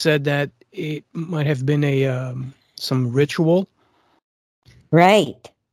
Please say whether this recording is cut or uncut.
cut